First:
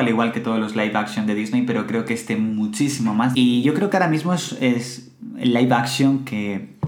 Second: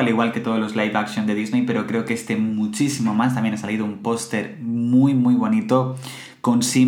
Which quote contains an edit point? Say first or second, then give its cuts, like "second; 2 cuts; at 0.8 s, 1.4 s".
first; 1 cut; at 3.3 s